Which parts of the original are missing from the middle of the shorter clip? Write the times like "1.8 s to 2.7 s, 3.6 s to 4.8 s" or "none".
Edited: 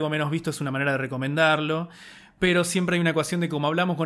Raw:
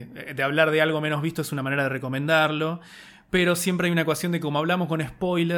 none